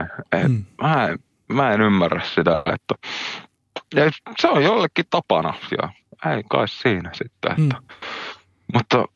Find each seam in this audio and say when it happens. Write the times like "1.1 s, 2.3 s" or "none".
none